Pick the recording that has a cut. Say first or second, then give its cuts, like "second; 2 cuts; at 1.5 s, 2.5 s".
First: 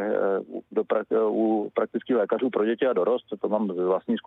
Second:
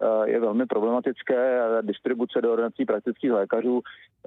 first; 1 cut; at 3.4 s